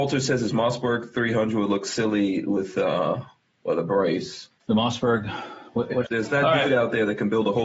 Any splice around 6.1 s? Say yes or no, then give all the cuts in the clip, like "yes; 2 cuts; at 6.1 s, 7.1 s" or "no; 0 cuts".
yes; 2 cuts; at 4.6 s, 6.1 s